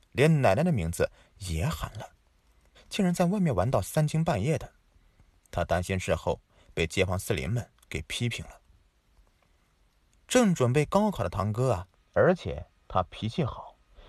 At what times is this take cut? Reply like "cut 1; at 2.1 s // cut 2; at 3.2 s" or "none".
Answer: cut 1; at 2.7 s // cut 2; at 10.2 s // cut 3; at 11.9 s